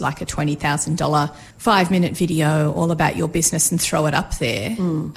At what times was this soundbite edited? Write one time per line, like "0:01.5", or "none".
0:01.5